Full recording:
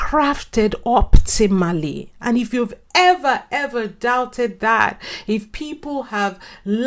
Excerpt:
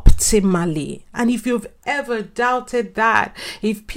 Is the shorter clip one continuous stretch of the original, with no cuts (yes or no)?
no